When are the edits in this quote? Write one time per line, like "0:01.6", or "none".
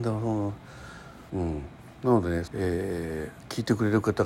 0:01.3
0:02.5